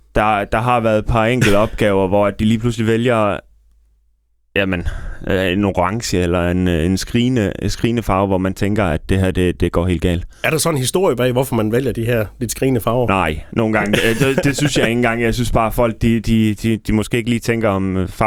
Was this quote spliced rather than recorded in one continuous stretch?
no; 0 cuts

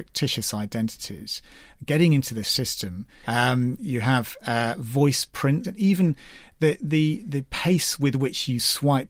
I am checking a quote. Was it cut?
yes; 2 cuts; at 3.2 s, 5.6 s

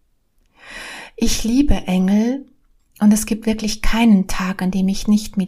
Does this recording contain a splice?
no; 0 cuts

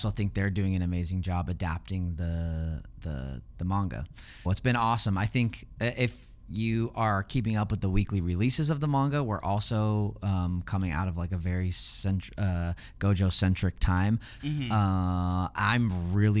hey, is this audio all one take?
no; 2 cuts; at 4.5 s, 14.4 s

